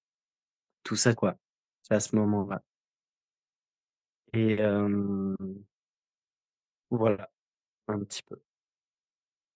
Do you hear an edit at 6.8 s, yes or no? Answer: no